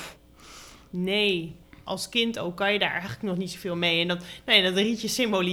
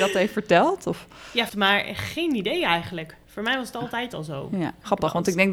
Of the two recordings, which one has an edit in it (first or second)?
second